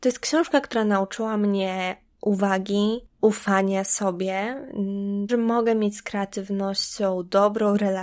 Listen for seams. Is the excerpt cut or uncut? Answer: cut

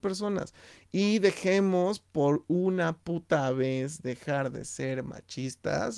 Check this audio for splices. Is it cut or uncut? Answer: uncut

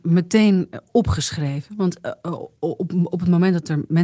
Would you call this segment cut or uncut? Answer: uncut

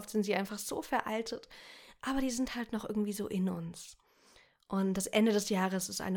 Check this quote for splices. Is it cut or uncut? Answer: uncut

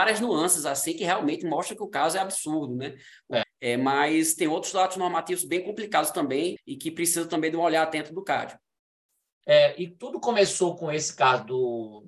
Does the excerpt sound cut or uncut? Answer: cut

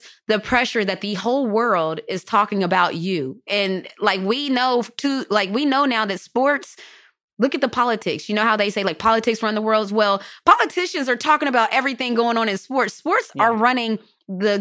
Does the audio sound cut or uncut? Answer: uncut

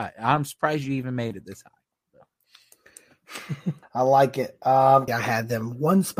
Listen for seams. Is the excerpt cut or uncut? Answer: cut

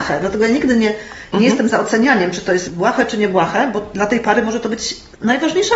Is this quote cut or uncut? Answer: uncut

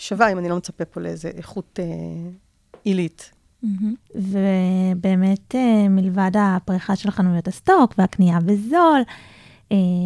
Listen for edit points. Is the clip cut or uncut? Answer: uncut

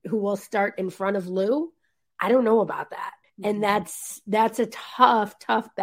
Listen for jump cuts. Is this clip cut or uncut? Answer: cut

